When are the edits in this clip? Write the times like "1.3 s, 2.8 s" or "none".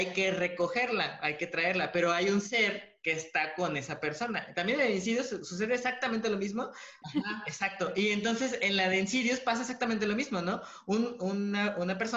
7.0 s

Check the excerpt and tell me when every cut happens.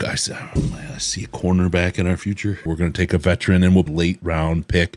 2.7 s, 3.9 s

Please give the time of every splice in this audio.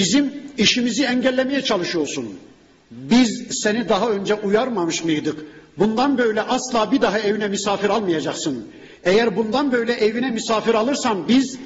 none

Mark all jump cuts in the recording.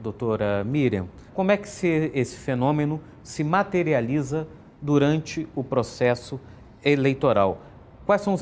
1.3 s

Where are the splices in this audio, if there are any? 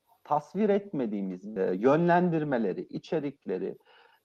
1.6 s

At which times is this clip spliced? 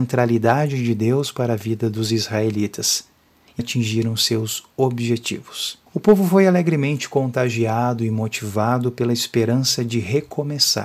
3.6 s, 5.9 s

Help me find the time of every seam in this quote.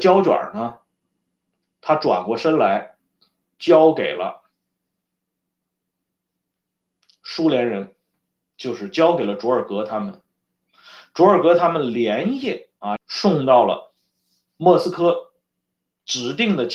13.0 s

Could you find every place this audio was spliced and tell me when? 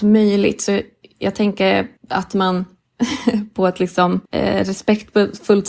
2.0 s, 4.3 s

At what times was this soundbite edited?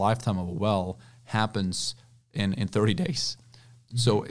none

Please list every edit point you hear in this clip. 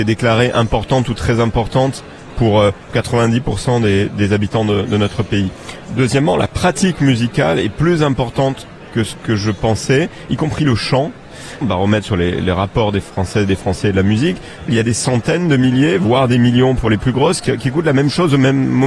11.6 s, 14.7 s

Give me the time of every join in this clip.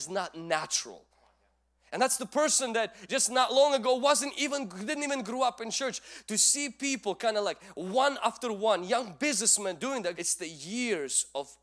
10.1 s

